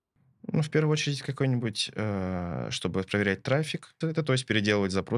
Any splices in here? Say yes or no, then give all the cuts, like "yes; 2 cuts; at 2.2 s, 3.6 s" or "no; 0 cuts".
yes; 1 cut; at 4.0 s